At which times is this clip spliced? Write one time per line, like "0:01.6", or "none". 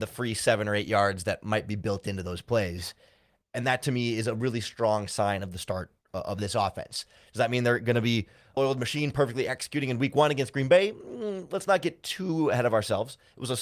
0:08.6